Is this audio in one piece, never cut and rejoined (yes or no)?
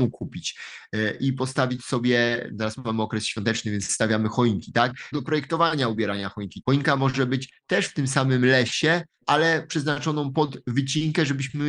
no